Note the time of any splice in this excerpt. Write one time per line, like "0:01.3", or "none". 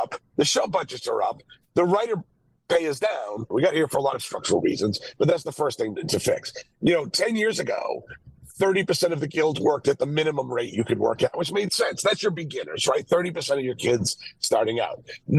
0:03.5